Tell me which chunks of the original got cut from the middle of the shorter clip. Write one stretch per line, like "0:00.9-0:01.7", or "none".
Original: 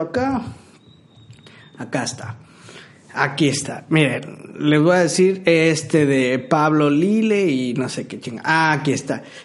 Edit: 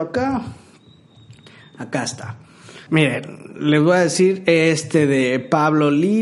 0:02.9-0:03.9